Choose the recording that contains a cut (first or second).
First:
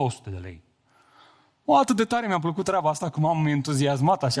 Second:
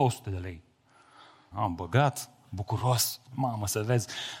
second